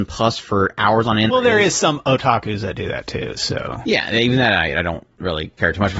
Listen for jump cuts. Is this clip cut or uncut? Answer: cut